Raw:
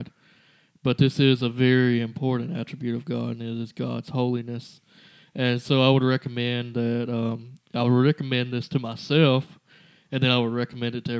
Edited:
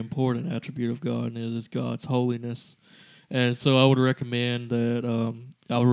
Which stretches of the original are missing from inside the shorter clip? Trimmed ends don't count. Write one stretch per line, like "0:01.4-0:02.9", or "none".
none